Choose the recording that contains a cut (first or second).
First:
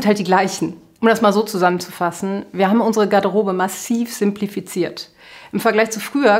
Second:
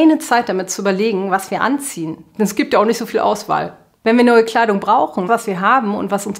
second